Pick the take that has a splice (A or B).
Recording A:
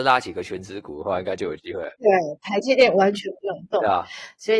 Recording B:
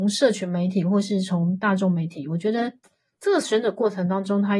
A